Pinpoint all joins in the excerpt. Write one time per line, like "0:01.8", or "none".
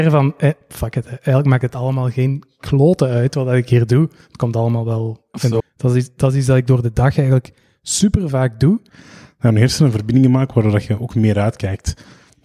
0:05.6
0:08.9